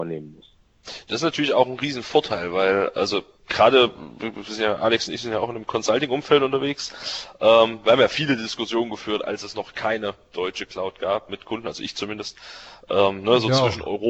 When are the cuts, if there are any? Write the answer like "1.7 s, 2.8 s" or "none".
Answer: none